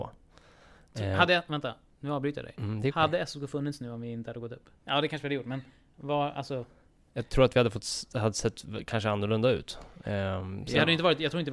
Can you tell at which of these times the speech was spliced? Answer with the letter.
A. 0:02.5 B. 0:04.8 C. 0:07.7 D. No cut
B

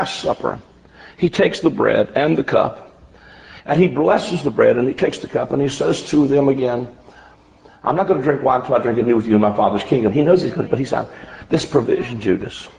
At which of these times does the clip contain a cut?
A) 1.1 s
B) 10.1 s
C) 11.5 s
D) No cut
B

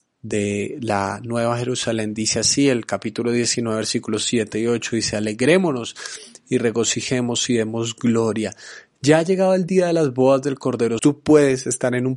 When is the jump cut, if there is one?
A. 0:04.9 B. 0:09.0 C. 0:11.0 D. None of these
C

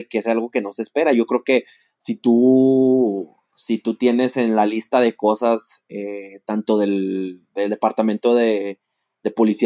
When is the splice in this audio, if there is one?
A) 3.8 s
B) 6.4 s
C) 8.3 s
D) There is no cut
D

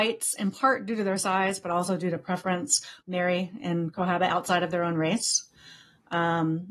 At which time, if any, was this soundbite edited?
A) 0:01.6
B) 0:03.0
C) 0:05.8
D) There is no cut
B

